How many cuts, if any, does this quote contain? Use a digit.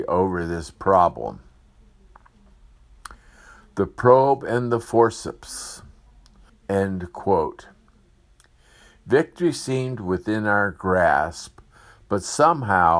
1